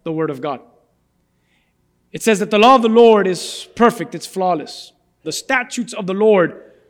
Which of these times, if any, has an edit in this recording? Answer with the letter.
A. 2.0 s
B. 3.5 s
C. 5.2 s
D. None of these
C